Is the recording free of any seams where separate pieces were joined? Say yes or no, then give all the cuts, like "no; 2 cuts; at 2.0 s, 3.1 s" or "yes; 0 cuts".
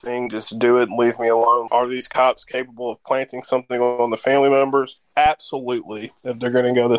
no; 1 cut; at 1.7 s